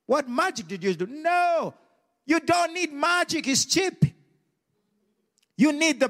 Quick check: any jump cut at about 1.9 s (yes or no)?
no